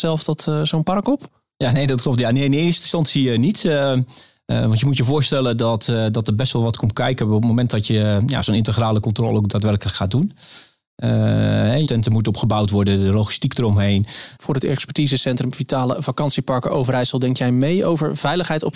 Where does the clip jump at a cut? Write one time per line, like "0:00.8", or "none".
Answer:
0:11.9
0:14.4